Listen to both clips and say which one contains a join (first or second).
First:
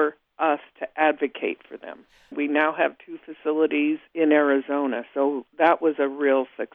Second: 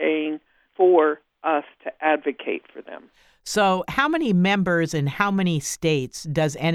first